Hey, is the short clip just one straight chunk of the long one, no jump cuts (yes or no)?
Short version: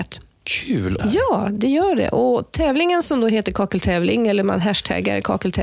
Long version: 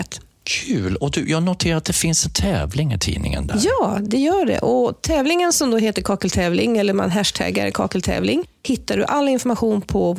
no